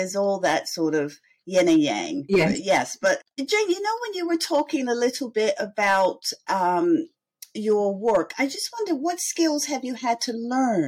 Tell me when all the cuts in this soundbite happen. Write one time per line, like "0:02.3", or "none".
none